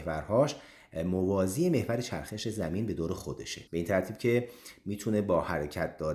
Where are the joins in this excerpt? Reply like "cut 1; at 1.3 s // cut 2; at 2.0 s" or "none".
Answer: cut 1; at 3.7 s

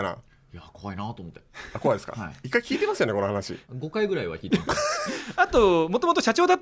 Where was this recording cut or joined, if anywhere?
cut 1; at 2.4 s

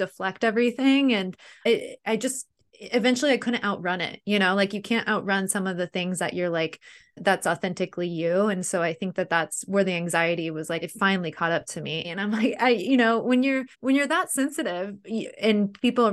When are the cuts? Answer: cut 1; at 10.8 s // cut 2; at 12.0 s // cut 3; at 13.7 s

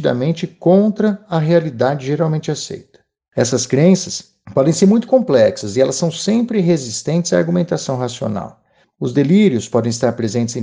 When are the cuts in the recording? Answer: cut 1; at 8.8 s

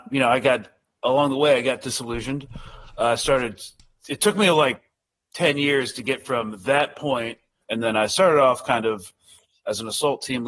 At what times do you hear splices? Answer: cut 1; at 7.6 s

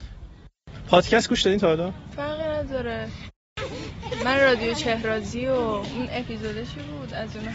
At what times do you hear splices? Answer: cut 1; at 2.1 s

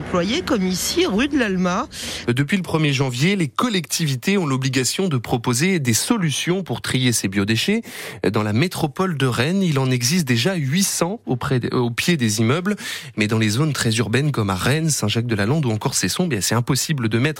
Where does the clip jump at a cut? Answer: cut 1; at 2.2 s

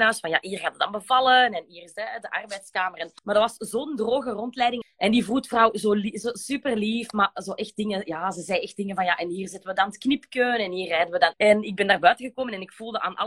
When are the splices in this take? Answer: cut 1; at 3.2 s // cut 2; at 4.8 s // cut 3; at 11.3 s

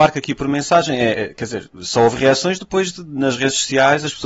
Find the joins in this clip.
cut 1; at 1.1 s

